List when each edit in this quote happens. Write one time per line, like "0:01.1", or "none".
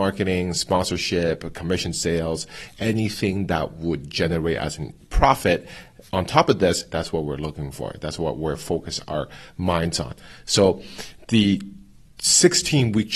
0:06.9